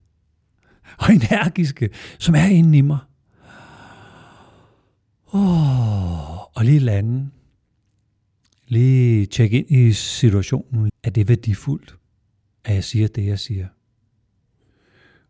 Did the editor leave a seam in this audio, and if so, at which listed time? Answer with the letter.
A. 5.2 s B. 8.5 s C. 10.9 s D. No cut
C